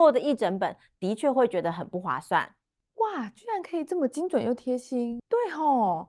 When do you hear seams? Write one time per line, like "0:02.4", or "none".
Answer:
0:02.8
0:05.2